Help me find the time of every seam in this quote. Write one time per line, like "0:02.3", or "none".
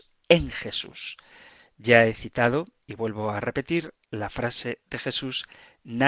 none